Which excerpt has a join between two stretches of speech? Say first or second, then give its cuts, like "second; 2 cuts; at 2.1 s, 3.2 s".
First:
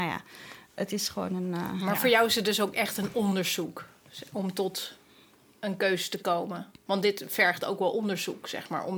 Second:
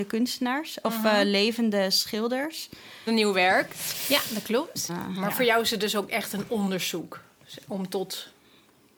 second; 2 cuts; at 3.1 s, 4.9 s